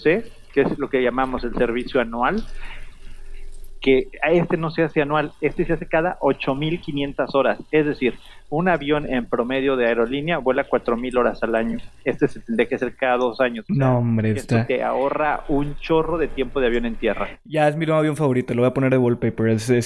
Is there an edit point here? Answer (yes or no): no